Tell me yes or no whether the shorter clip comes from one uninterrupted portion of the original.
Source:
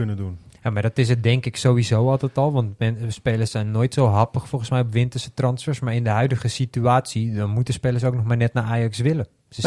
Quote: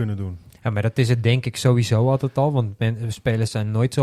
yes